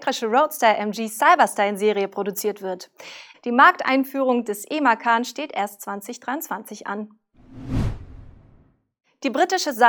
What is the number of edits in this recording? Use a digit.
1